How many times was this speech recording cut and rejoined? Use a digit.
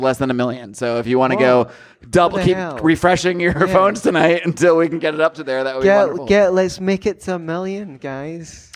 0